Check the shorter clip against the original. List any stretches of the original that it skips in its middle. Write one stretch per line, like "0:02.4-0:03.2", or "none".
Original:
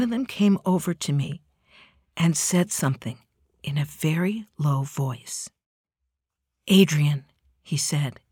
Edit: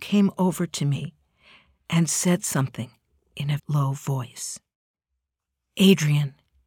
0:03.9-0:04.5